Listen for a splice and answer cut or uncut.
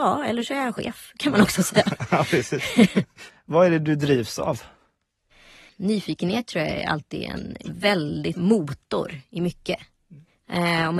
cut